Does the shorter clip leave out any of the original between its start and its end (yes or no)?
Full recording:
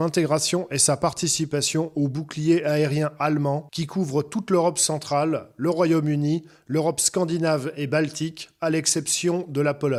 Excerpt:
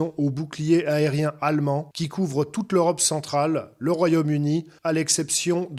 yes